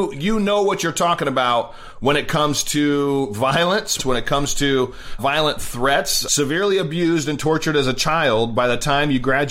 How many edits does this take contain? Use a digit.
3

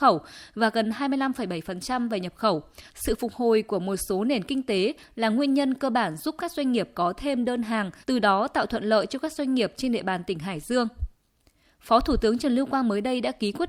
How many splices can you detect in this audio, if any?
2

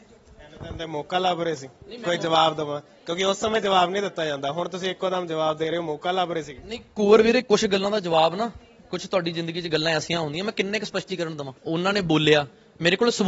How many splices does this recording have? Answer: 1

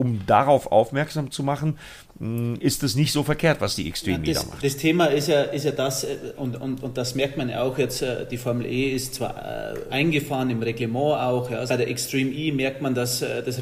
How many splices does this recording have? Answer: 2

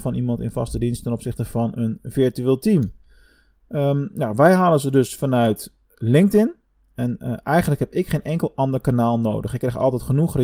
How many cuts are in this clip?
0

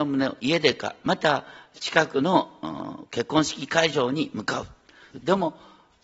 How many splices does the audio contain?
1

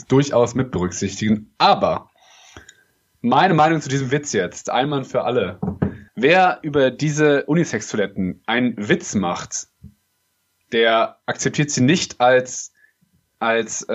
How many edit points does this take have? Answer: 1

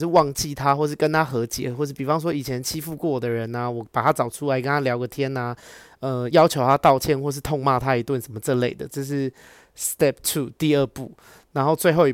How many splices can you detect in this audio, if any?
0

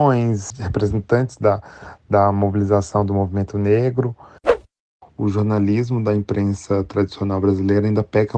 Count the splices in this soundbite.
0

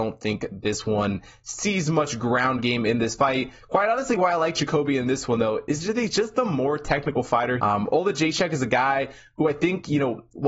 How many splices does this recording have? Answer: 1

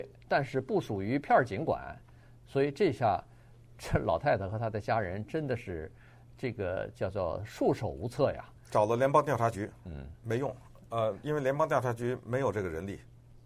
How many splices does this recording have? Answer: 0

